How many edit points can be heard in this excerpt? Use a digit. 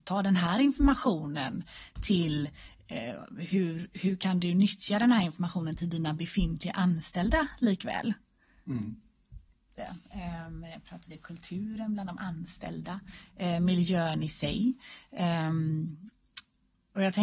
1